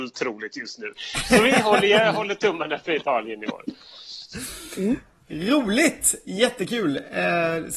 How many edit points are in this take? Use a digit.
0